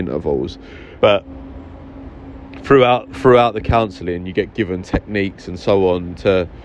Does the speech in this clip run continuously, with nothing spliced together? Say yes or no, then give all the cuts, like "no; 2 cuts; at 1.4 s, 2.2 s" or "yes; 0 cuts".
no; 1 cut; at 1.0 s